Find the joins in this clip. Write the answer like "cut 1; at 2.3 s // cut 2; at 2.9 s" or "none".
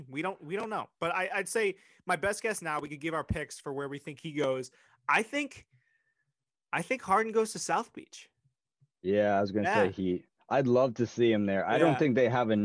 none